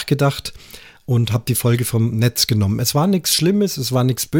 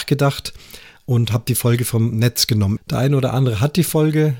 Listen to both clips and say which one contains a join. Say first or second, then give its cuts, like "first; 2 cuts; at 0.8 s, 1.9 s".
second; 1 cut; at 2.8 s